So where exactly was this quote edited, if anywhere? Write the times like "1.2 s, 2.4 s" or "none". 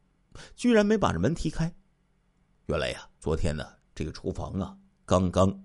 3.2 s